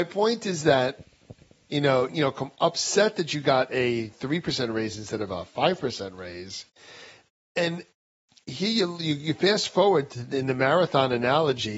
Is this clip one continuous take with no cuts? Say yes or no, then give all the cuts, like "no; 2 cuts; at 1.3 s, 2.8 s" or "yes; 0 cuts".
no; 1 cut; at 2.1 s